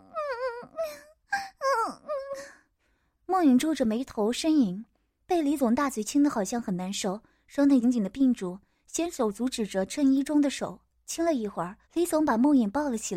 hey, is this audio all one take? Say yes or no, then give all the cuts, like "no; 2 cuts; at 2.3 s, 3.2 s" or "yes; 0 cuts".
no; 2 cuts; at 7.8 s, 11.8 s